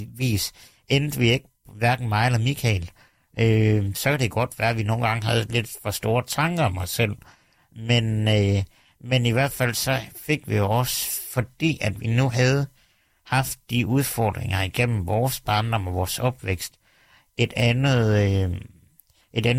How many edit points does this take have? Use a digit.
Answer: 0